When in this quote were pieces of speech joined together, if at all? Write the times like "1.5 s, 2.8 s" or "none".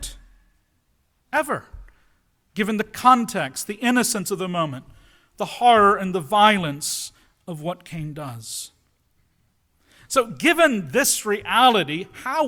none